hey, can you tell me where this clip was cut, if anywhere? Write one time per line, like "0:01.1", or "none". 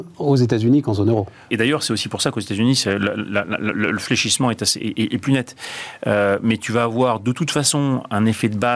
0:01.5

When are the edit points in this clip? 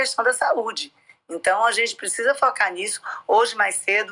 none

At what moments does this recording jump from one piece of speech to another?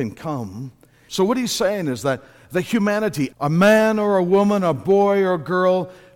0:01.1
0:03.3

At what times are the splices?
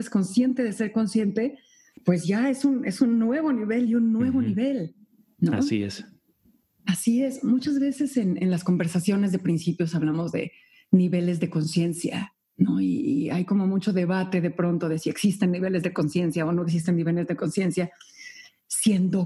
none

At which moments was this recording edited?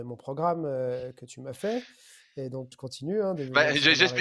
0:02.7

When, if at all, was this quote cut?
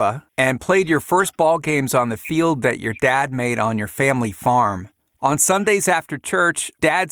none

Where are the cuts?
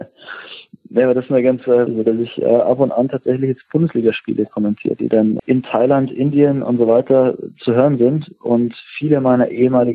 0:01.9
0:05.4

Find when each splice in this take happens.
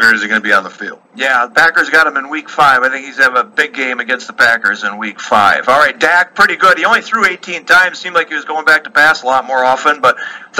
0:01.1

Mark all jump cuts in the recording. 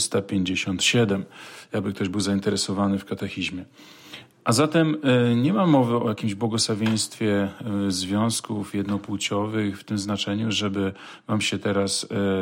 none

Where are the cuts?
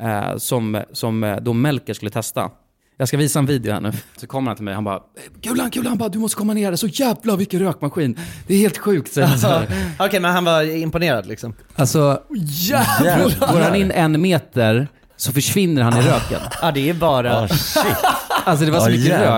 0:04.2

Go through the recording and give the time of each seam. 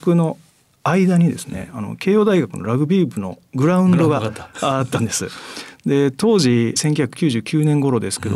none

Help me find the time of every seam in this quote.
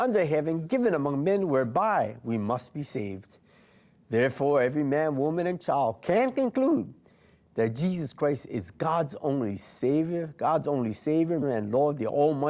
0:11.4

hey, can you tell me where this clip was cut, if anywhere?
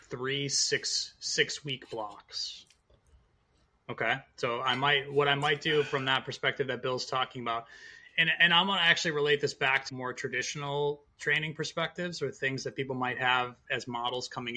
0:08.1
0:09.9

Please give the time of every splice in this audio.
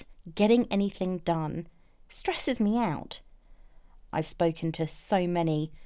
0:04.1

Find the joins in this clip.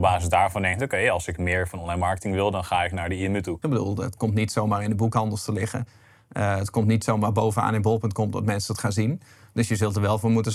0:03.6

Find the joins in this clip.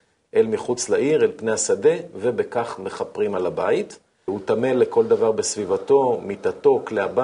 0:04.3

